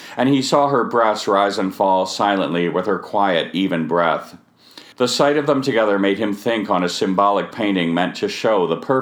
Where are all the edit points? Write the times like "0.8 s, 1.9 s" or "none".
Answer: 4.9 s

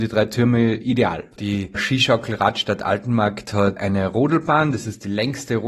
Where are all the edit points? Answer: 1.3 s

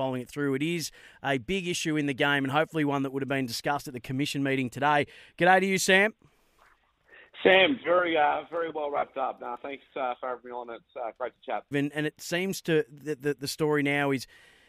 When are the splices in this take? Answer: 11.7 s

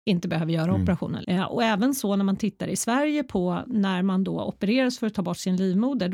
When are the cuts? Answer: 1.2 s

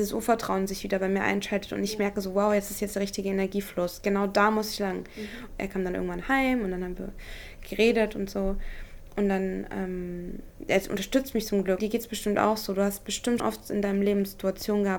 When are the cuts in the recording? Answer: 5.5 s, 11.8 s, 13.4 s

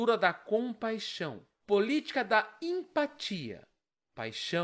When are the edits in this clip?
1.6 s

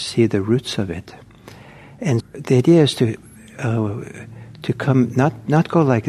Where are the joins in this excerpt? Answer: 2.2 s

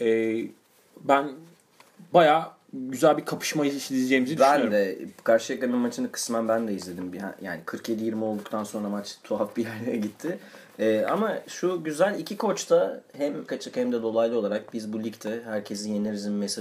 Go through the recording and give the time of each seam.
13.5 s

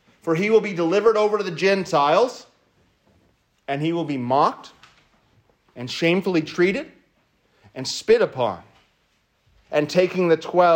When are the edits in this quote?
9.7 s

